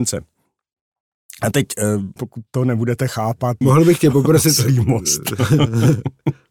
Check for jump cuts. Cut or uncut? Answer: cut